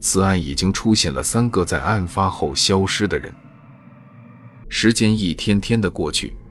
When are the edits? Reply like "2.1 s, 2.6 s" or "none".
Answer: 4.6 s